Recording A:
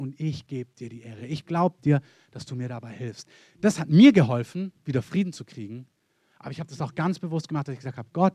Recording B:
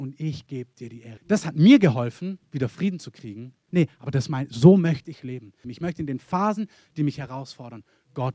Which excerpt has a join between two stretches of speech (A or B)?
B